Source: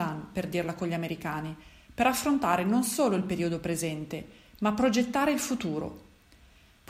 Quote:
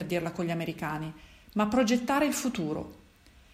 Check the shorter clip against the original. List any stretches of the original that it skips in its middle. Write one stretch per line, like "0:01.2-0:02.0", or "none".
0:01.8-0:04.5